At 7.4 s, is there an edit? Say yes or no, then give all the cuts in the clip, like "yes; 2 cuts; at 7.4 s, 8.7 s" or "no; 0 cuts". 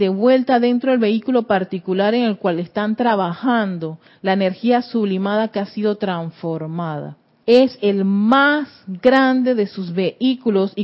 yes; 1 cut; at 7.4 s